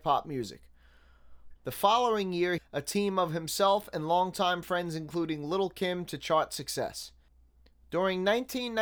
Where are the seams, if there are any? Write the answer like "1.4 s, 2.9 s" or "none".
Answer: 1.6 s, 2.6 s